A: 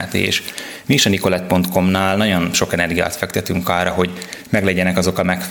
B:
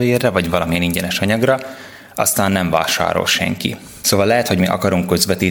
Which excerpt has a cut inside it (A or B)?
B